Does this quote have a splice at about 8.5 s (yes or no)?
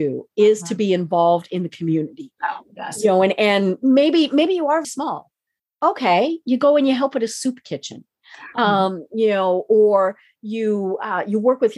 no